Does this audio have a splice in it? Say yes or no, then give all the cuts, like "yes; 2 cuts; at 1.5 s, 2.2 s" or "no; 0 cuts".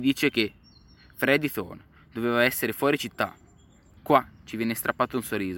yes; 1 cut; at 4.0 s